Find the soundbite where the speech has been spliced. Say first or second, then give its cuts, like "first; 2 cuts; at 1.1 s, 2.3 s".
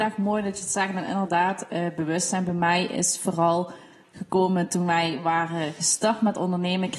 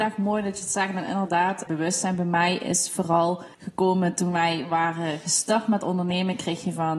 second; 2 cuts; at 1.7 s, 3.5 s